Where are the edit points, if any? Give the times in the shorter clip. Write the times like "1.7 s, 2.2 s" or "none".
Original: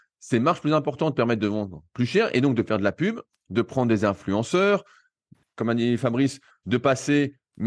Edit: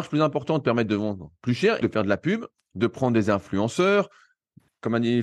1.8 s